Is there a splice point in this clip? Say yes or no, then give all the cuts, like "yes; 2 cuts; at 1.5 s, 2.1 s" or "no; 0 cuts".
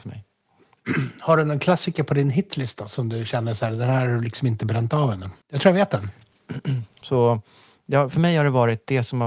yes; 2 cuts; at 5.4 s, 7.0 s